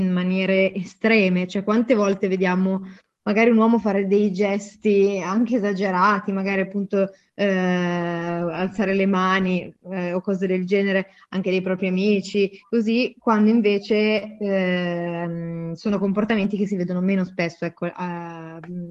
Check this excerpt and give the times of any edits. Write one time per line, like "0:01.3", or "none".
none